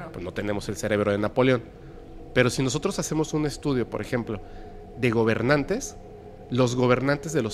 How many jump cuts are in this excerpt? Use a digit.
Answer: 0